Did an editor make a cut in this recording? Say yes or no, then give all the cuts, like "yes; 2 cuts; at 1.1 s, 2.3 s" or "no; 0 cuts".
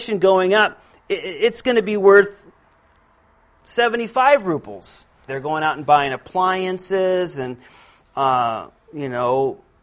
yes; 1 cut; at 5.3 s